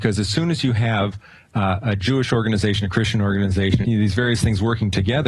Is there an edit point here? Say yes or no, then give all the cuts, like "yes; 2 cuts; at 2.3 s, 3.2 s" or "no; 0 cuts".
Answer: yes; 1 cut; at 3.8 s